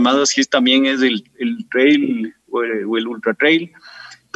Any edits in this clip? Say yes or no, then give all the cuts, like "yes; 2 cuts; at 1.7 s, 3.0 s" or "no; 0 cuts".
no; 0 cuts